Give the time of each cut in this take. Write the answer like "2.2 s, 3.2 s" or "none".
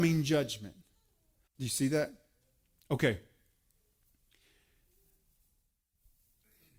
1.5 s